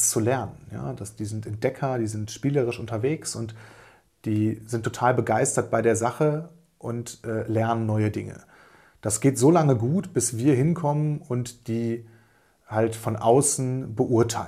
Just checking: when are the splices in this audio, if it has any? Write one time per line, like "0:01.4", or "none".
none